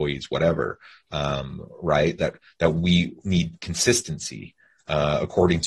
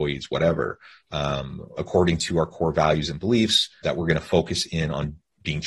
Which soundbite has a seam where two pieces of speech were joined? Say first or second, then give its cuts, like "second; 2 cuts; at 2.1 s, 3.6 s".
second; 2 cuts; at 1.8 s, 3.8 s